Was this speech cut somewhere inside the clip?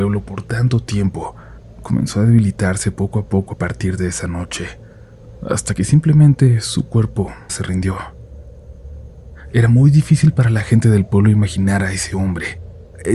yes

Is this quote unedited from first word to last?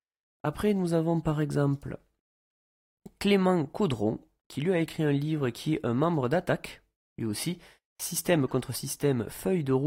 yes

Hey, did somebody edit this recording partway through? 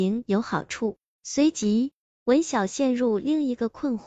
no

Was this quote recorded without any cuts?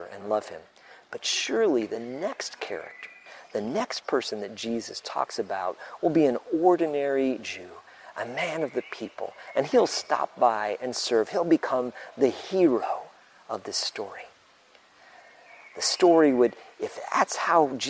yes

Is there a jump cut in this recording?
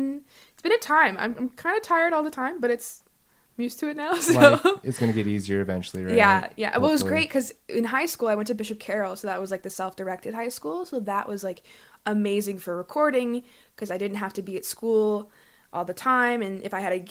no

